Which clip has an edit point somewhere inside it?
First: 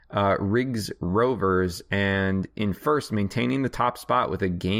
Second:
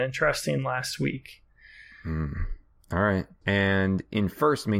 second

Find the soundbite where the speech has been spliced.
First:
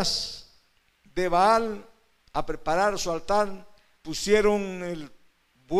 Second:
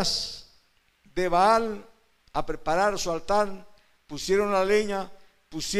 first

